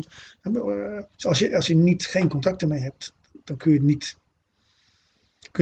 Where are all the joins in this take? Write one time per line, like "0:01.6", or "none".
0:01.1